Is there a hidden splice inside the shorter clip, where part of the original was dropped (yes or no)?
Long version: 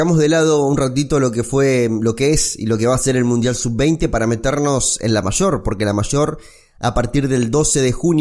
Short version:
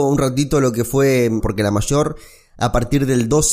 yes